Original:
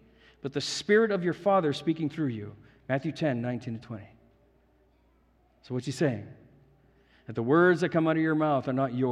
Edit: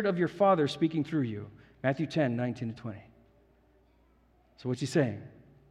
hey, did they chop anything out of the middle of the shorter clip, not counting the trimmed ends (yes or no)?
no